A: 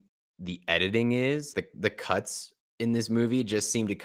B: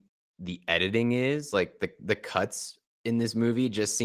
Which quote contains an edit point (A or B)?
A